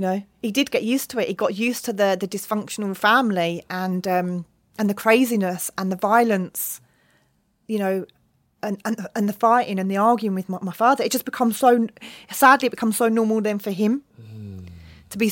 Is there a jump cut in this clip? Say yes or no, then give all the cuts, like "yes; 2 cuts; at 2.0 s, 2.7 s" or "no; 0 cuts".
no; 0 cuts